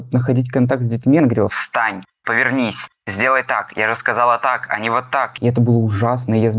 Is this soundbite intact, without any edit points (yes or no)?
yes